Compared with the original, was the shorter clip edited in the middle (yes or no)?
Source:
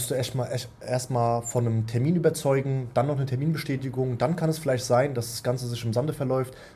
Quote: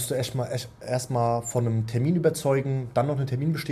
no